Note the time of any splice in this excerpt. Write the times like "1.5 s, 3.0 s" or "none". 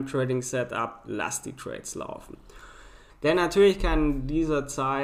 3.1 s